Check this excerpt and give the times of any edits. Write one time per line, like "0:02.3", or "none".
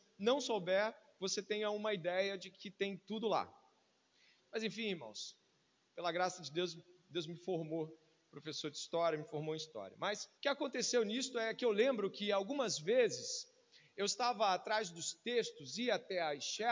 0:04.4
0:10.4